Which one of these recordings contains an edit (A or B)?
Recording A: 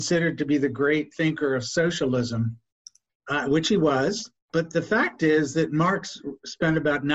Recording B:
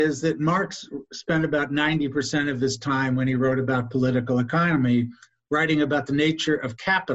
A